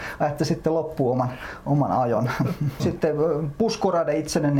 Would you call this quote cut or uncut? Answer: cut